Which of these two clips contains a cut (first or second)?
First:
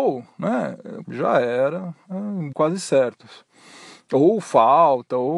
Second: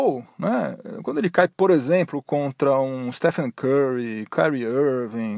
first